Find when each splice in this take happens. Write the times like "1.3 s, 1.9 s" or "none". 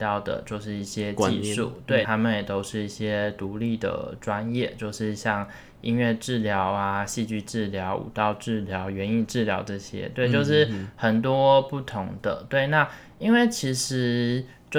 2.0 s